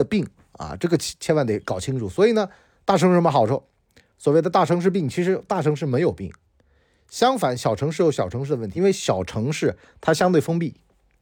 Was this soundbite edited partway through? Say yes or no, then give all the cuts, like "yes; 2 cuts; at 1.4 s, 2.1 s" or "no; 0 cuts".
yes; 1 cut; at 8.8 s